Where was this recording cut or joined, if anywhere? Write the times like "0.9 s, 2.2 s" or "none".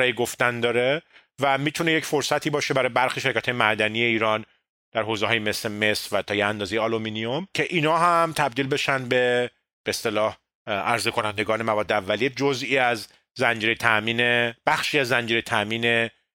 none